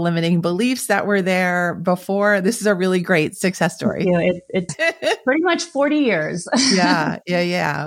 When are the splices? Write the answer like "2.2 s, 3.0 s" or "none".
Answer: 4.7 s